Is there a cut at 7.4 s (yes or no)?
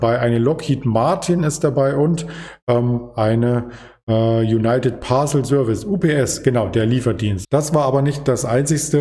yes